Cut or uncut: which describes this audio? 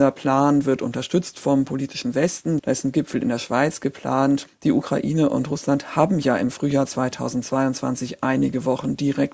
cut